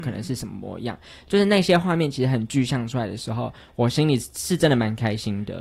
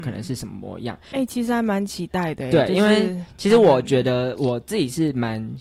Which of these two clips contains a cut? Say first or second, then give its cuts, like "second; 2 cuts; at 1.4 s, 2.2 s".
second; 1 cut; at 1.1 s